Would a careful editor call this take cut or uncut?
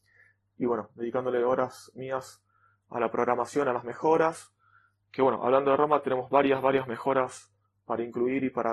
uncut